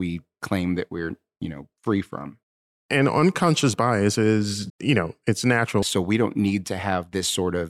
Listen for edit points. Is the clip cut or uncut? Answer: cut